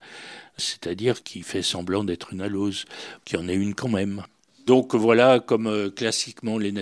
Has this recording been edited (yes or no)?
no